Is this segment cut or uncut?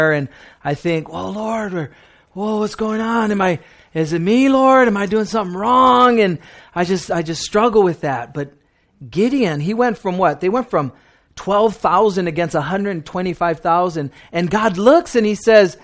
uncut